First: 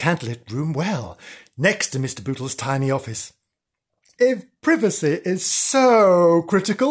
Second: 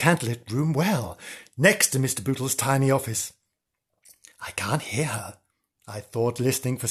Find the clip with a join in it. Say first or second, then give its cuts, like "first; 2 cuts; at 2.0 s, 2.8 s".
first; 1 cut; at 4.2 s